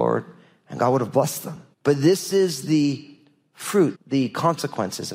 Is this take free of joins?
no; 2 cuts; at 1.7 s, 3.9 s

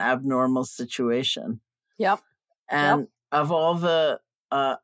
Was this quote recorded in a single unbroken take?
yes; 0 cuts

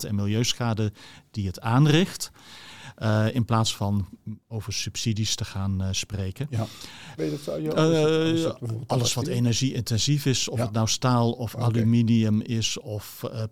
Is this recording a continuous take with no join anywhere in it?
no; 1 cut; at 7.2 s

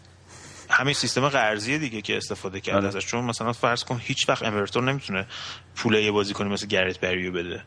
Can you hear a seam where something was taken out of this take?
yes; 1 cut; at 0.9 s

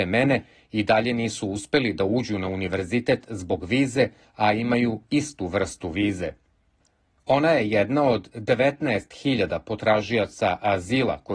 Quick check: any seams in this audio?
no; 0 cuts

